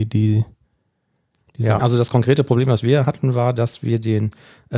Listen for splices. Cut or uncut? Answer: cut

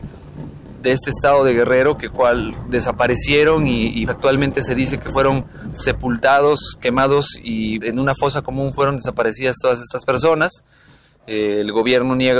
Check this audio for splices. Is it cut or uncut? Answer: cut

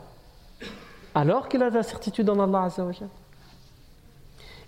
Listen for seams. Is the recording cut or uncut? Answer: uncut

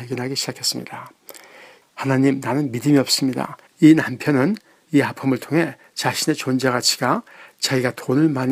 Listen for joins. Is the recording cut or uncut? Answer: cut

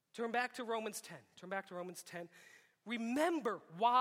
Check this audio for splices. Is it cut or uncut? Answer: uncut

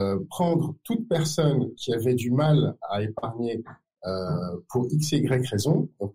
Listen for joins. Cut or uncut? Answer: uncut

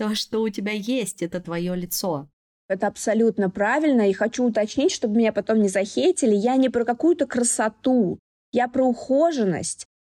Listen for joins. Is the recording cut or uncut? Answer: uncut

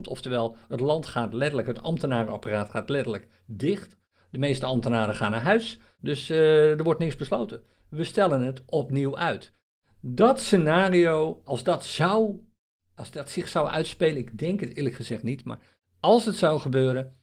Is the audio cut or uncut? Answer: cut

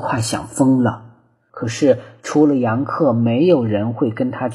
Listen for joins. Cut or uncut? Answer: cut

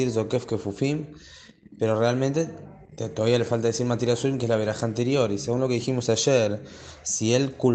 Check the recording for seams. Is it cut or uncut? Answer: uncut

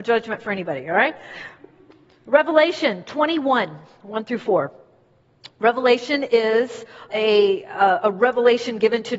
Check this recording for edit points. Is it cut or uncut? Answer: cut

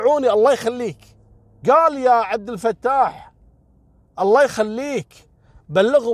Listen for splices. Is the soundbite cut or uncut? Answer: cut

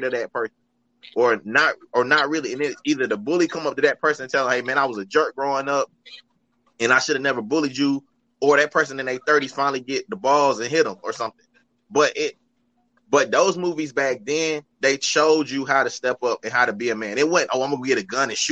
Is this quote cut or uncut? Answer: uncut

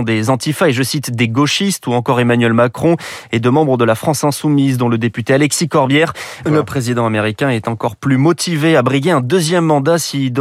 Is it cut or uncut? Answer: cut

